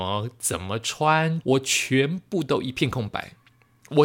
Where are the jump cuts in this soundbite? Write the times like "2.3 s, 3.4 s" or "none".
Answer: 1.4 s

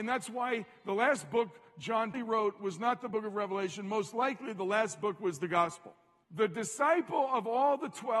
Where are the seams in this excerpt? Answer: 2.1 s, 6.2 s

